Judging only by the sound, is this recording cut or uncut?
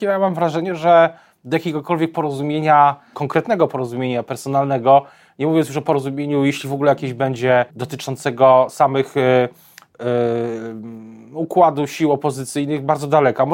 cut